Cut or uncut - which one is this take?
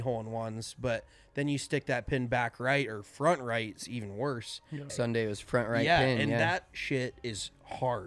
cut